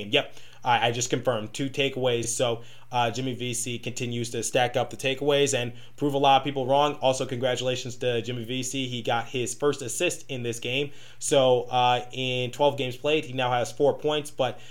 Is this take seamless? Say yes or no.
yes